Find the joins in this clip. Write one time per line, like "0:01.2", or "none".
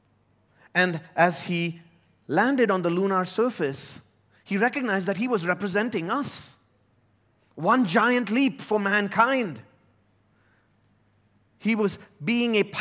none